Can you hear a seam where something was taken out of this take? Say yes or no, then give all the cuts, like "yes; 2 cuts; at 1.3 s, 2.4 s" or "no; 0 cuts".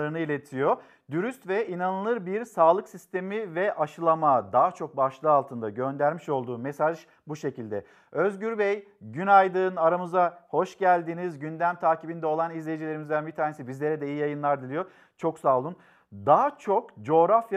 no; 0 cuts